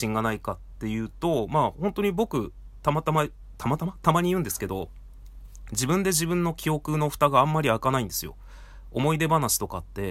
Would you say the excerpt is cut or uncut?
uncut